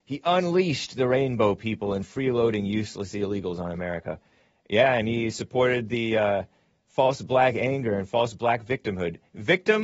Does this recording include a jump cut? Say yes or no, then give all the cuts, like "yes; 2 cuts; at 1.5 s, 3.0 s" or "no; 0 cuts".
no; 0 cuts